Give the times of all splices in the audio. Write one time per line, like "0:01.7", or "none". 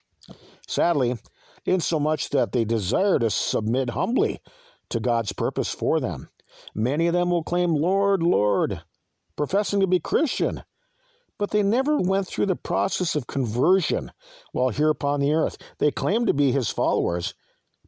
0:01.6
0:12.0